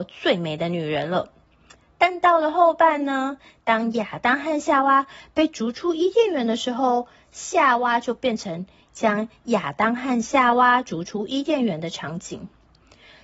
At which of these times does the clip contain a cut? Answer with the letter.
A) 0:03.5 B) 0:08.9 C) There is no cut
B